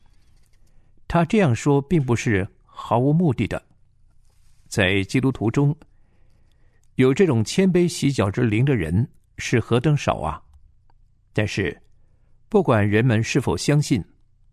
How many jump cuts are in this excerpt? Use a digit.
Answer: 0